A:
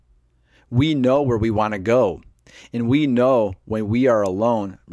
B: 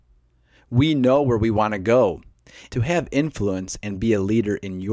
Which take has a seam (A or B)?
B